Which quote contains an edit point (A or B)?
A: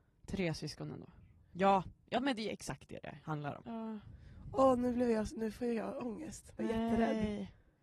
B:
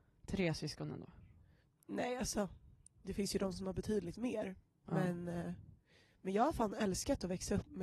A